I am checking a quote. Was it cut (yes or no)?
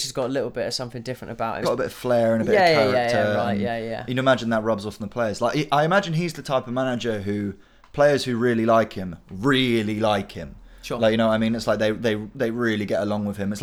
yes